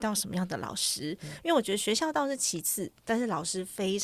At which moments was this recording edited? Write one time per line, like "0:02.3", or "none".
none